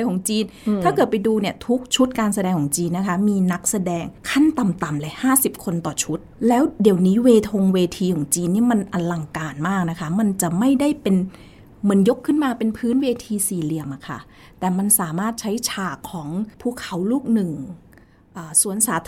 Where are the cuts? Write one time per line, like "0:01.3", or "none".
0:16.5

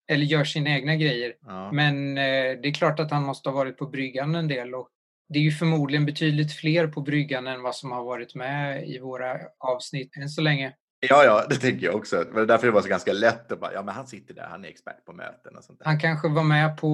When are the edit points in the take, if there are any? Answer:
none

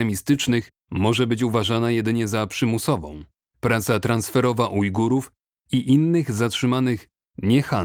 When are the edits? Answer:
0:03.5

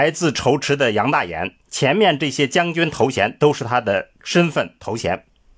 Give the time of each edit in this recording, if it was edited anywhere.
0:01.7

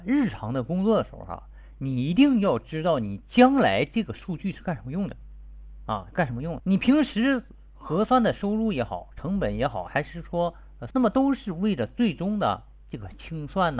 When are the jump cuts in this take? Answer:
0:06.6
0:10.9

